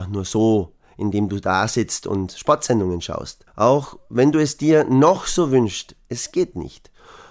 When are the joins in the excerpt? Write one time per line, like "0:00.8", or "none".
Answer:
0:03.5